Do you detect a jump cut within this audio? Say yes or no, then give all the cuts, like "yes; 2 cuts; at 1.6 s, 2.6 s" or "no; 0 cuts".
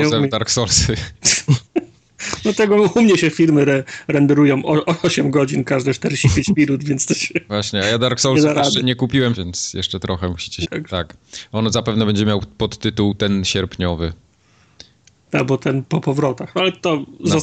yes; 2 cuts; at 9.3 s, 10.6 s